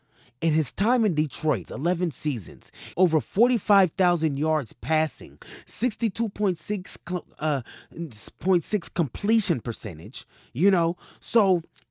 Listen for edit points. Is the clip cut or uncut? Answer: cut